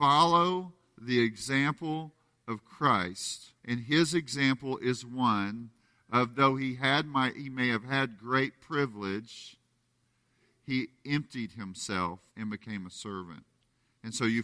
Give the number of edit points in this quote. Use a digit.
2